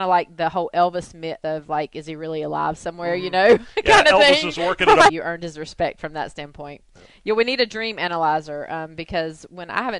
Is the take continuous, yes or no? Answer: no